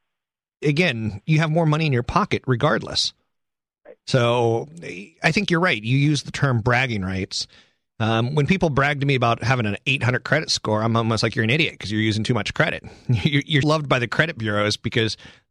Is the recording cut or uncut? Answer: cut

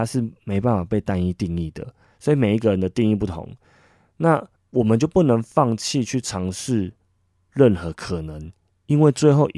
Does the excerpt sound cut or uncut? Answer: cut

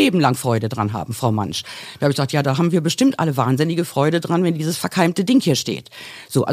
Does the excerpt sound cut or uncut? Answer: uncut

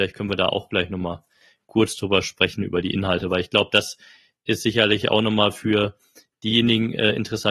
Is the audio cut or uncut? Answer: uncut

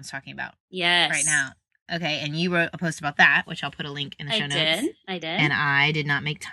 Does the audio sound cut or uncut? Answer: uncut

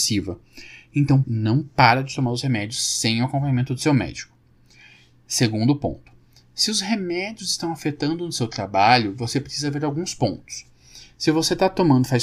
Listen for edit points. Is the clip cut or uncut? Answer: cut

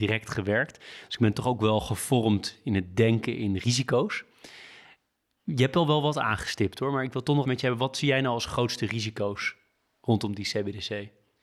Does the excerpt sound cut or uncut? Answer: cut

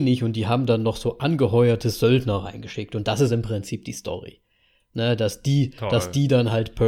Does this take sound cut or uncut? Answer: uncut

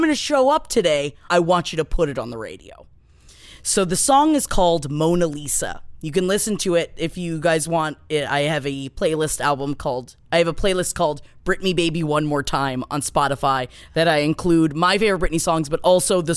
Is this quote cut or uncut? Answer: cut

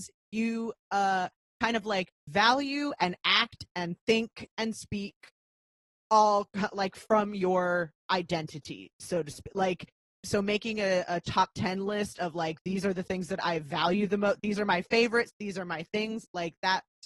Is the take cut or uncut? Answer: uncut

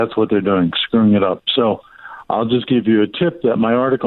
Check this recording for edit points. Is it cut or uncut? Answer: uncut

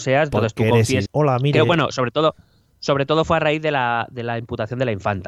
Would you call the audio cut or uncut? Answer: cut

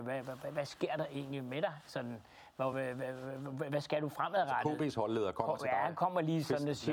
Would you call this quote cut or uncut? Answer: uncut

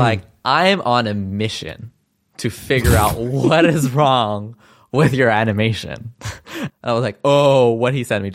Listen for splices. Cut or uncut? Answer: cut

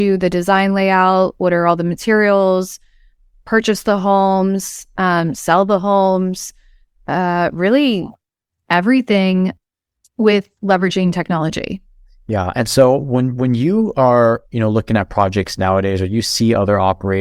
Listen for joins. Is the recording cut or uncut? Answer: uncut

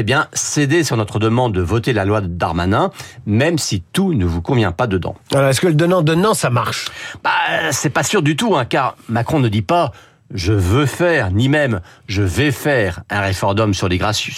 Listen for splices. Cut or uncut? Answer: uncut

